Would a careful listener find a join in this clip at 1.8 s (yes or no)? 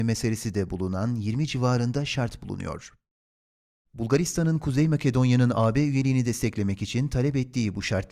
no